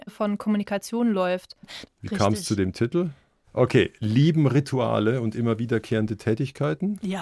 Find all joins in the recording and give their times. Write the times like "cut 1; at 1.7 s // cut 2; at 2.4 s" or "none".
cut 1; at 1.8 s // cut 2; at 3.4 s